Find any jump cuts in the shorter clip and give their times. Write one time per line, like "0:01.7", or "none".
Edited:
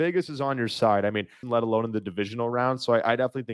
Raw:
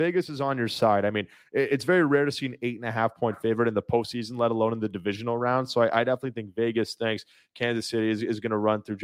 0:01.4